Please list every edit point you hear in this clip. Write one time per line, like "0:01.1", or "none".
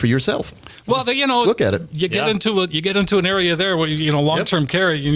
0:01.4